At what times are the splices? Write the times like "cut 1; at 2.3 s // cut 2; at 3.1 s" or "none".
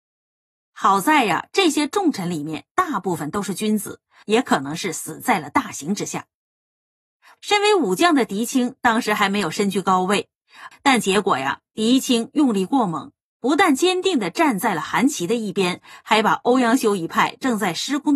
cut 1; at 4.2 s // cut 2; at 7.4 s // cut 3; at 10.7 s